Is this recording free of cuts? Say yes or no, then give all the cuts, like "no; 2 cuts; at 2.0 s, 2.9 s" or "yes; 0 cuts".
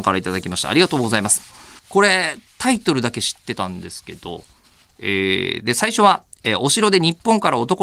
no; 1 cut; at 1.8 s